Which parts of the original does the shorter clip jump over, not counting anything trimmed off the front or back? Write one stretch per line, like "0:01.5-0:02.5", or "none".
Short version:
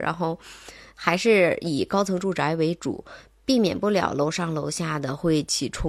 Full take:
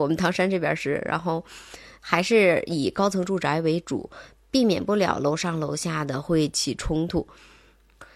none